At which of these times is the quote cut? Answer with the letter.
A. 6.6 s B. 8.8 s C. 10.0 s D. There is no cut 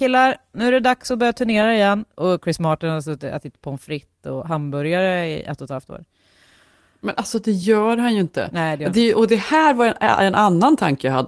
C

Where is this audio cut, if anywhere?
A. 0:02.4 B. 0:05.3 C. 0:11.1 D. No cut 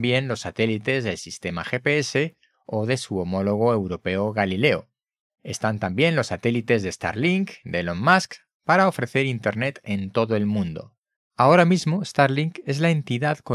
C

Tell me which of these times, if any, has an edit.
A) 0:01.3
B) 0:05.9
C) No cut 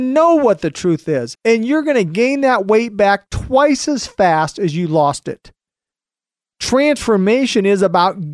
A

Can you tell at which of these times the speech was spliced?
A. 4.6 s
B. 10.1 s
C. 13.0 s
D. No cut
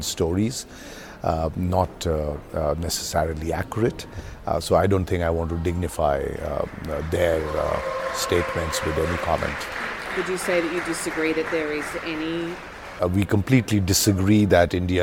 C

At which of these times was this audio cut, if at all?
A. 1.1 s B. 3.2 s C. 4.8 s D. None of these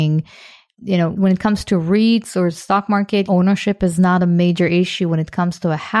B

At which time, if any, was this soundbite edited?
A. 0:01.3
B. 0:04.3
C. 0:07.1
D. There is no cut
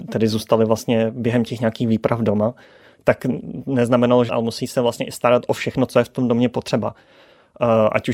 B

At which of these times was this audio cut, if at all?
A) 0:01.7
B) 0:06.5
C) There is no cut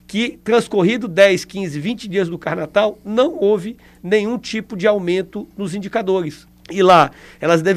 B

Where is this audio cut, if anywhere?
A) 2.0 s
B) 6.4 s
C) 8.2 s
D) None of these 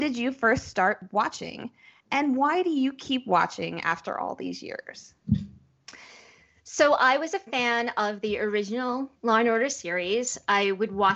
D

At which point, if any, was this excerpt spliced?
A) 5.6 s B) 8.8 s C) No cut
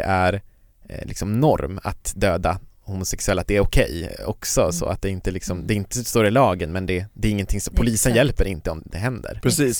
B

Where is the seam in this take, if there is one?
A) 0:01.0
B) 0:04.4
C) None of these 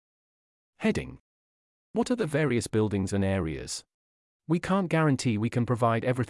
B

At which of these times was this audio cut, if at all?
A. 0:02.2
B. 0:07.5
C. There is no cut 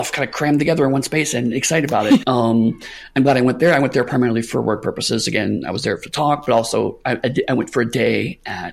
A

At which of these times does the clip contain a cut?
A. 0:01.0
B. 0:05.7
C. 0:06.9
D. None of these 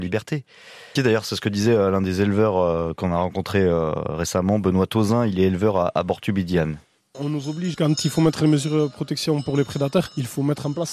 A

